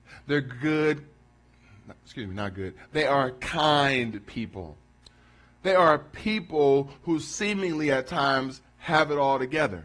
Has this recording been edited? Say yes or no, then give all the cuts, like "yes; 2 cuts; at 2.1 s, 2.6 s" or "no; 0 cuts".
no; 0 cuts